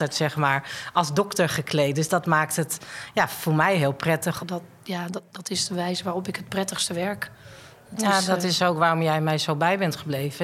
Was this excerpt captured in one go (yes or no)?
no